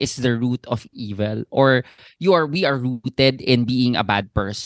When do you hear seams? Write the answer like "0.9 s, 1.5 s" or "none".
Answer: none